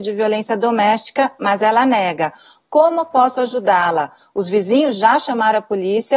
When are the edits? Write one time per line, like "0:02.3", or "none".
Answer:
none